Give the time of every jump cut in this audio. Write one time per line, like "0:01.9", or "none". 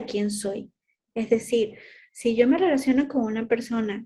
0:01.1